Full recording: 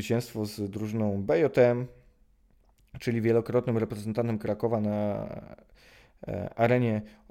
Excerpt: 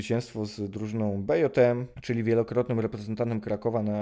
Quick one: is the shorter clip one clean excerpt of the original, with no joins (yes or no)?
no